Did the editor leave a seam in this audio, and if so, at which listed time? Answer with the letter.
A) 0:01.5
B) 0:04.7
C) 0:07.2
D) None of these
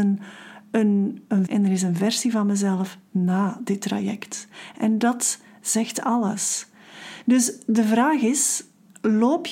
A